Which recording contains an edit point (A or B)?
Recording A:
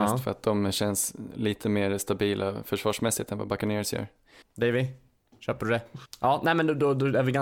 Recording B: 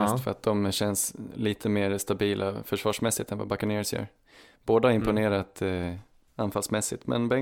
A